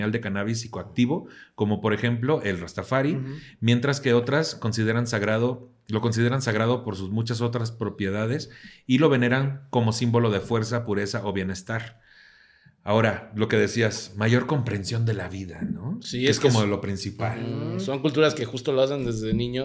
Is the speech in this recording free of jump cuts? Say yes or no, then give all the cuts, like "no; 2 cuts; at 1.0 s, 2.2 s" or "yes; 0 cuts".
yes; 0 cuts